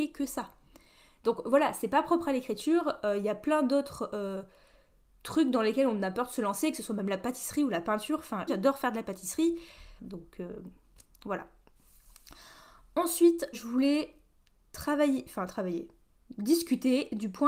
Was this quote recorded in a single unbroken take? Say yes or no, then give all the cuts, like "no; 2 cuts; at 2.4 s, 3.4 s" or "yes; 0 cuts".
no; 3 cuts; at 8.5 s, 10.0 s, 13.5 s